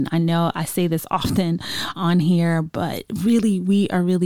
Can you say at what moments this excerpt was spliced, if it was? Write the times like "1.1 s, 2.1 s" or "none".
1.9 s